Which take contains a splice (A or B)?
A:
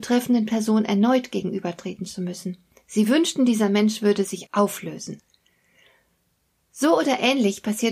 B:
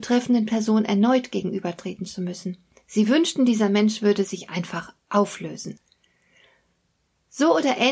A